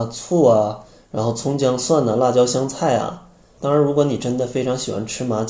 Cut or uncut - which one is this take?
cut